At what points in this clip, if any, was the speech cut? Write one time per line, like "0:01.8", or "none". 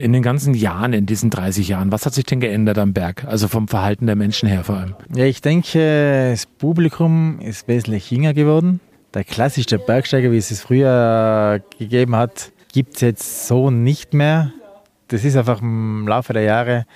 none